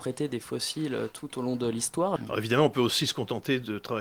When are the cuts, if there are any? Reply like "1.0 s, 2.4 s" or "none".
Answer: 2.2 s